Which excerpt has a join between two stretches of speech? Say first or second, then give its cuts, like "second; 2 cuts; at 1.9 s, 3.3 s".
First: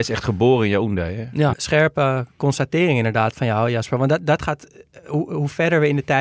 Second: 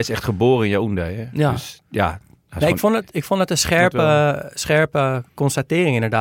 first; 1 cut; at 1.5 s